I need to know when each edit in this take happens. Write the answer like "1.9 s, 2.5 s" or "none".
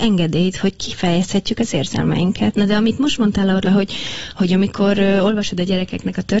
2.5 s, 3.6 s